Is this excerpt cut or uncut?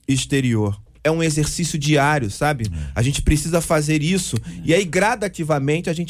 cut